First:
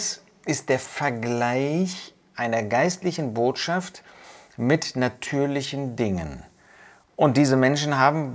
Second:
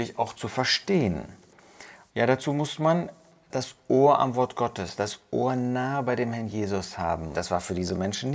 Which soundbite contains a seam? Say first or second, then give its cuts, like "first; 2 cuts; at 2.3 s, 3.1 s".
second; 2 cuts; at 2.1 s, 7.3 s